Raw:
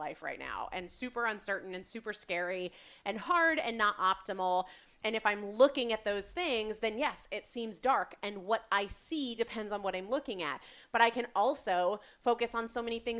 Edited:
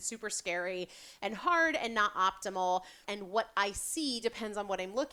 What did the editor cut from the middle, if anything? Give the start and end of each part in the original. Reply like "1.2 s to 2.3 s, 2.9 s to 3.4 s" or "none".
4.9 s to 8.2 s